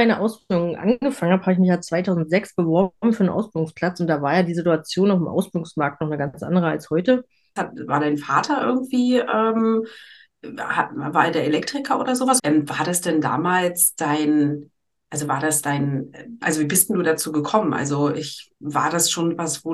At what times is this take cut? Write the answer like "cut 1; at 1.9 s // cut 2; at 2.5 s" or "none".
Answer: cut 1; at 7.6 s // cut 2; at 12.4 s // cut 3; at 16.4 s